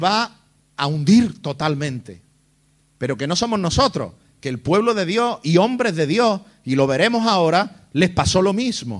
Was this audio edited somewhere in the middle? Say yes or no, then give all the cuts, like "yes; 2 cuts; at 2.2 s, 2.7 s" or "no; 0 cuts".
yes; 1 cut; at 2.8 s